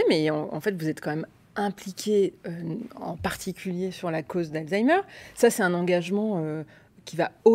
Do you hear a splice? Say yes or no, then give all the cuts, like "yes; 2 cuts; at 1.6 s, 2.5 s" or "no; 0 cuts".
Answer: no; 0 cuts